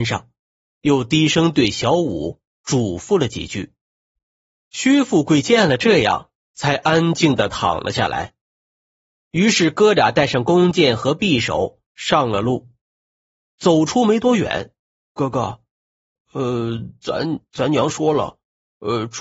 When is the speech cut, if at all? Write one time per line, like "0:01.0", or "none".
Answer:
0:14.9